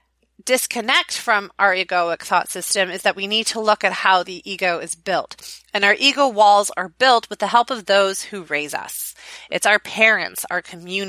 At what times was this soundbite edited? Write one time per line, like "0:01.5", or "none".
none